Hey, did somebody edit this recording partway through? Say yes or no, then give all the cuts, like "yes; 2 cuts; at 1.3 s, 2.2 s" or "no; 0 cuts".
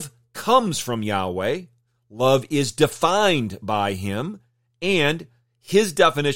no; 0 cuts